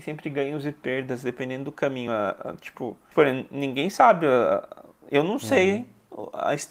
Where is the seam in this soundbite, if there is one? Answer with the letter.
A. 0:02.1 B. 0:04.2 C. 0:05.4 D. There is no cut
D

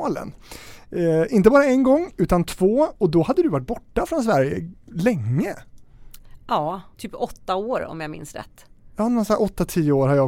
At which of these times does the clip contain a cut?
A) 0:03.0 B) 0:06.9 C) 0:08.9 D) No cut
B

